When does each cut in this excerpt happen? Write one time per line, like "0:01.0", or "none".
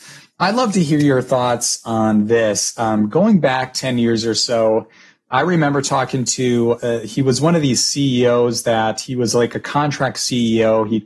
none